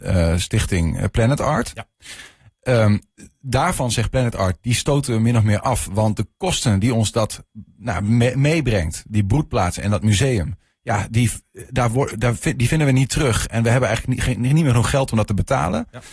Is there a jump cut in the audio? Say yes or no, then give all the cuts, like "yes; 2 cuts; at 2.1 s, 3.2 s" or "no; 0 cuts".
no; 0 cuts